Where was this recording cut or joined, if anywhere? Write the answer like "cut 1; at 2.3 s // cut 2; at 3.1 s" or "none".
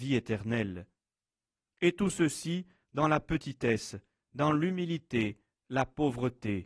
none